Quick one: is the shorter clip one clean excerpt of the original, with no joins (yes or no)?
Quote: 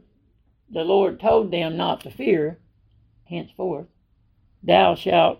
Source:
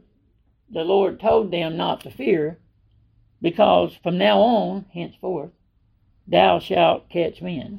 no